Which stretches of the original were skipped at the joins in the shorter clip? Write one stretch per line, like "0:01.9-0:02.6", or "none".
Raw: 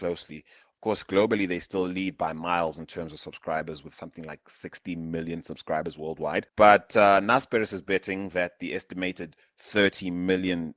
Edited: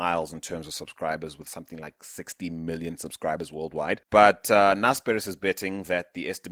none